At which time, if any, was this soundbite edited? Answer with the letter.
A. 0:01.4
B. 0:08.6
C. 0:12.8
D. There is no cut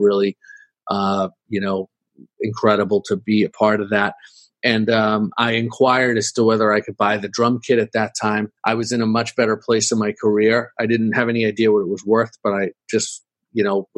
B